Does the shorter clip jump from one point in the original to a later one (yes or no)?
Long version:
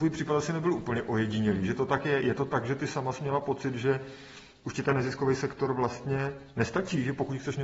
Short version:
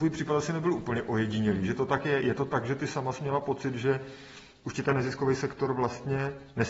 no